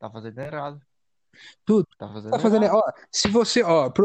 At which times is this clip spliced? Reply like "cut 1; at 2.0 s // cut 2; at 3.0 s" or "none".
cut 1; at 1.9 s